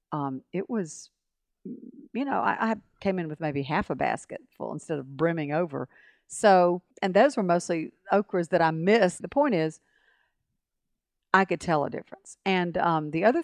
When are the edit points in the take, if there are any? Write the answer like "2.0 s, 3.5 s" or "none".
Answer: 6.9 s, 9.2 s